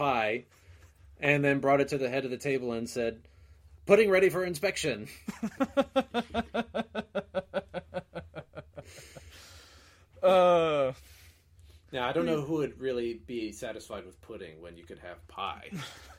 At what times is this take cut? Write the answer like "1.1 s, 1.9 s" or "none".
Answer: none